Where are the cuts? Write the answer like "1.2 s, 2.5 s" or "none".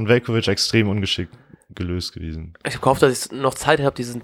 none